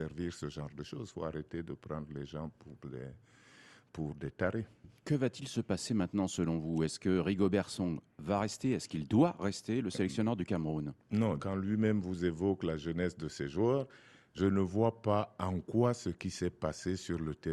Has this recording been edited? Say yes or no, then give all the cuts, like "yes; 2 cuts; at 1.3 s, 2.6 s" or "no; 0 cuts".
yes; 1 cut; at 5.0 s